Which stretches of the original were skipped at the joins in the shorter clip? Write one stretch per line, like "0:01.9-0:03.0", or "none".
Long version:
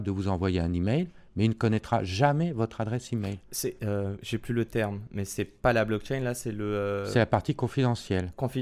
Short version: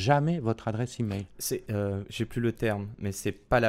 none